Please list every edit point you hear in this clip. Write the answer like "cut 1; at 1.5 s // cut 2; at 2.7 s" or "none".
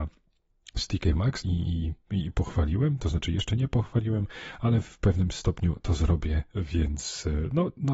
cut 1; at 1.4 s